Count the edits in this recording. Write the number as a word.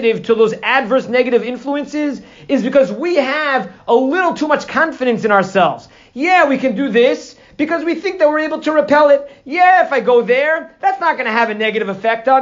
zero